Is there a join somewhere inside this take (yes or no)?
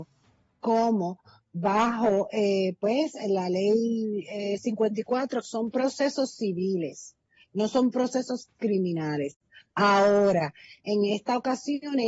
yes